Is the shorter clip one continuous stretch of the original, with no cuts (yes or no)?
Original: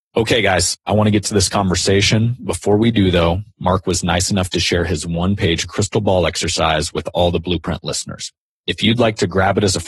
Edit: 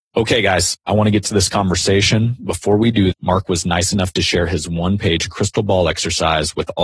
no